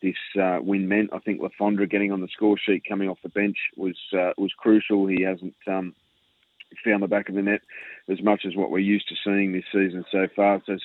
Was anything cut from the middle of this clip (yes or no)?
no